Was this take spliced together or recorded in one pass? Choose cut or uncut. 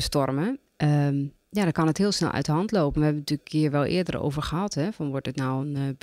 uncut